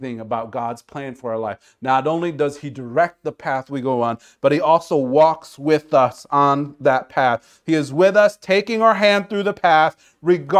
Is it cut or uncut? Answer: uncut